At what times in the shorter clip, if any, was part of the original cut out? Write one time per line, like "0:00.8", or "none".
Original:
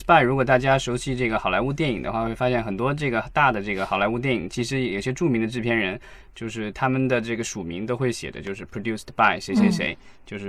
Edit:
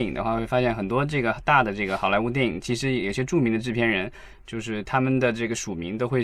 none